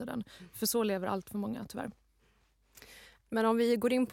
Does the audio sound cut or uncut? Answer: uncut